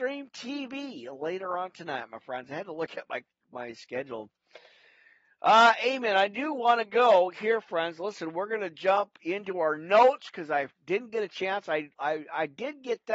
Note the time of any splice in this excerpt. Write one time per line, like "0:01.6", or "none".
none